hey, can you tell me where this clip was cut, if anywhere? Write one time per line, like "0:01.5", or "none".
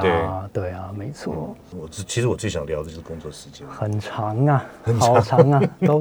0:01.7